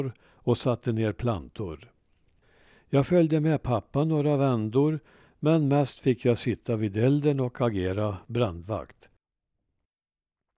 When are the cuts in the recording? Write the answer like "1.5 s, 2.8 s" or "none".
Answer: none